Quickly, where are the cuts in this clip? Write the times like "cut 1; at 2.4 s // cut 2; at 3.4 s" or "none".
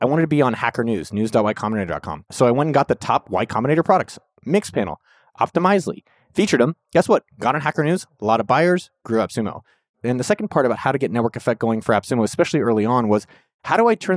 none

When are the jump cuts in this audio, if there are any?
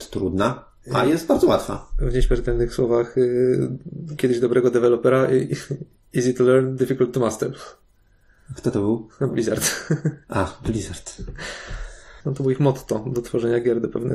cut 1; at 12.2 s

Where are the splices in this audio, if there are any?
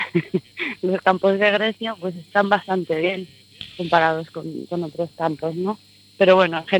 none

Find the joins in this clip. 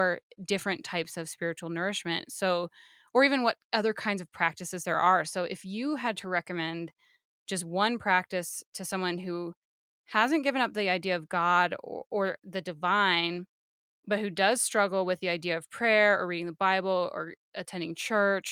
none

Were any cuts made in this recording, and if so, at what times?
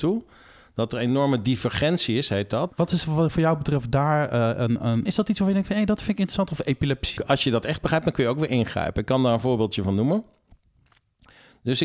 cut 1; at 2.7 s // cut 2; at 5.1 s // cut 3; at 7.2 s

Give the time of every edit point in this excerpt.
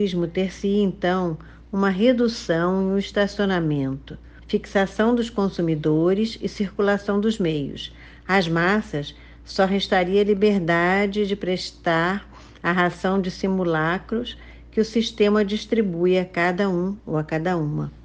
cut 1; at 4.4 s

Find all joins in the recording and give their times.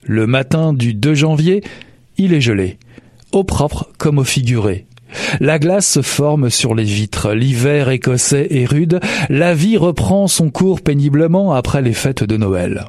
none

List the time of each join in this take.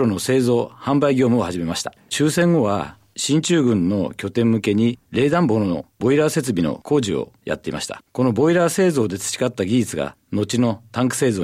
none

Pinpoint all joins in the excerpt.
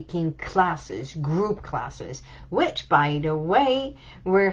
none

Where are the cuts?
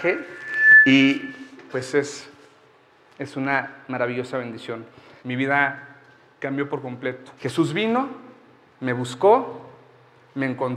cut 1; at 5.2 s // cut 2; at 7.4 s

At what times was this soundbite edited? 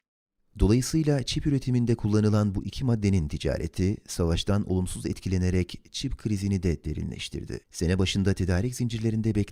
cut 1; at 7.6 s

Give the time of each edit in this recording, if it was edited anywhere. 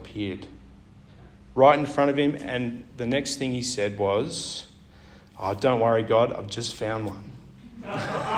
none

